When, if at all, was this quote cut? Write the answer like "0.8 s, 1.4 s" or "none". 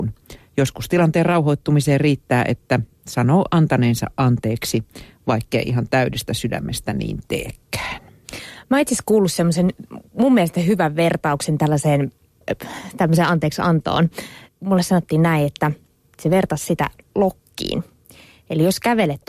none